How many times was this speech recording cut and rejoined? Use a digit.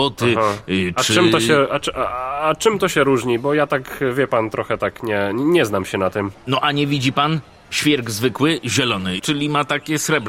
2